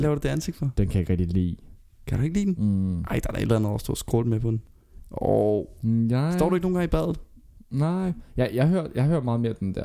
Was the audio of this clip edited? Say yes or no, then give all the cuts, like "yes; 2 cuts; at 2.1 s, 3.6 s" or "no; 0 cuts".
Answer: no; 0 cuts